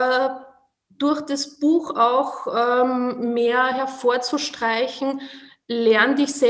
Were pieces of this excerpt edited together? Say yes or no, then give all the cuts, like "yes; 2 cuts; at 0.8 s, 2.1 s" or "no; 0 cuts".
no; 0 cuts